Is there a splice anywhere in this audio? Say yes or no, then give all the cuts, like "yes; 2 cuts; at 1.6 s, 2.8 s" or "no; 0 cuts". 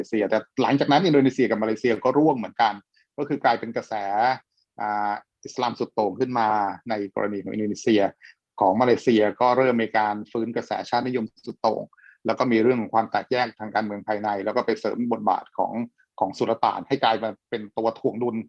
no; 0 cuts